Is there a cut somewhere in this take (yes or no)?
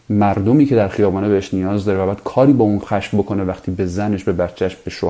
yes